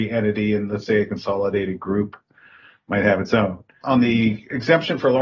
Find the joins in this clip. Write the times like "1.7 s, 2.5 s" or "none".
3.8 s